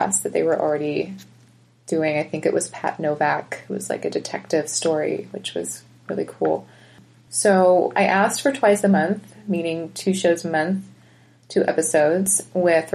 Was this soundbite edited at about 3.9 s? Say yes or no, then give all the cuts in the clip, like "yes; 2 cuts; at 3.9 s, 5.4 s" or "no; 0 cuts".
no; 0 cuts